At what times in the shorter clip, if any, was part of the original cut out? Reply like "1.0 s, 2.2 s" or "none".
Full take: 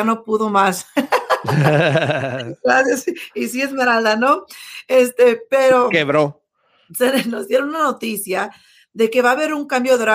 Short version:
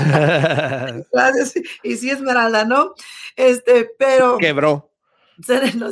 none